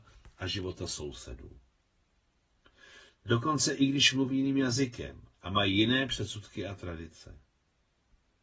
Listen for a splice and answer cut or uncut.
cut